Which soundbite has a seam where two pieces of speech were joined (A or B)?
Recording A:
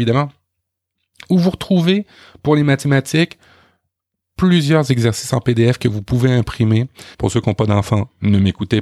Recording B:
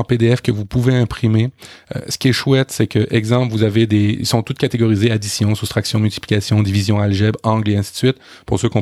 A